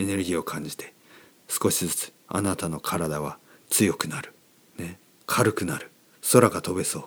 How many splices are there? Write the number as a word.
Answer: zero